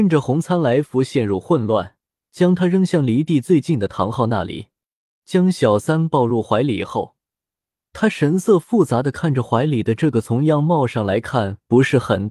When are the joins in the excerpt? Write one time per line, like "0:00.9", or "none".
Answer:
0:02.3
0:05.2